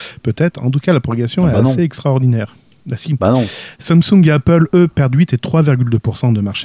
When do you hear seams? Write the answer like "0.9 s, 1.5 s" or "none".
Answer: none